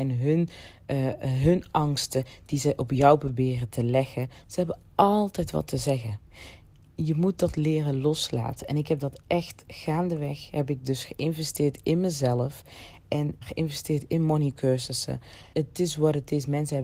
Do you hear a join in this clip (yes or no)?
yes